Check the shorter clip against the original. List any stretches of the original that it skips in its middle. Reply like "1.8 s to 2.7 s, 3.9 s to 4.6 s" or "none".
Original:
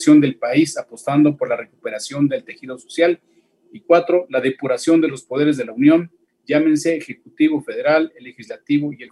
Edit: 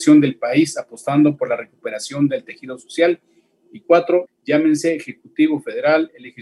4.3 s to 6.3 s